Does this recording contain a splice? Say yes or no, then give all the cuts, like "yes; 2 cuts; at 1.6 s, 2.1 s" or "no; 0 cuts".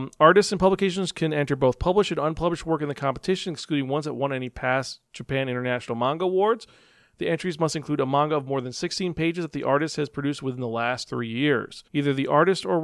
yes; 1 cut; at 11.9 s